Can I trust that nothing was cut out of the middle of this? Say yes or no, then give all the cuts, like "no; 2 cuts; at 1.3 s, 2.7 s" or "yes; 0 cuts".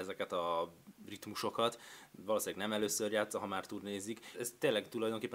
no; 1 cut; at 4.3 s